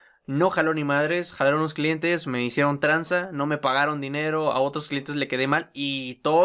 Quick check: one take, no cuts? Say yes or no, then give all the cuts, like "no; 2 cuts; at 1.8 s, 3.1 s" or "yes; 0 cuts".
yes; 0 cuts